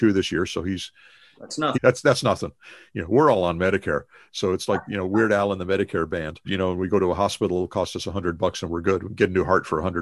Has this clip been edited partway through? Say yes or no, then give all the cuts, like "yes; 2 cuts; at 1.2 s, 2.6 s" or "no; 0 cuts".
yes; 2 cuts; at 1.7 s, 6.4 s